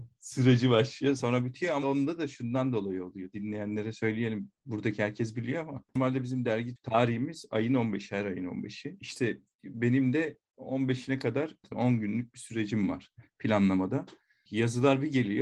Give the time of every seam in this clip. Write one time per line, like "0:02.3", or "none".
0:01.8